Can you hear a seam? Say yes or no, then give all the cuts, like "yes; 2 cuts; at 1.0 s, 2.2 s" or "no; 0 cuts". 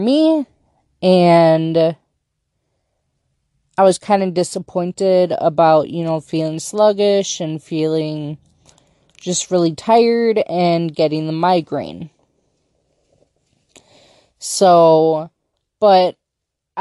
no; 0 cuts